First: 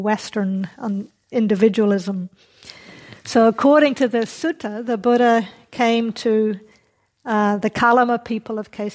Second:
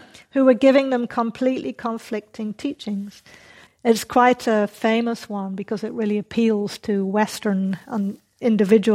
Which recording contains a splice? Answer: second; 1 cut; at 3.7 s

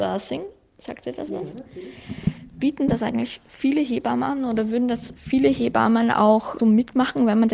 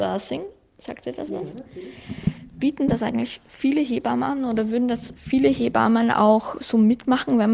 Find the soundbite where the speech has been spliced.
first; 1 cut; at 6.6 s

